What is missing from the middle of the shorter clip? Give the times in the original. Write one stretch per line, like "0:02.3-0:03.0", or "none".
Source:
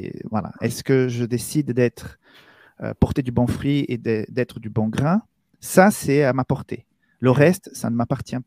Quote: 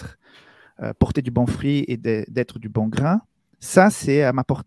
none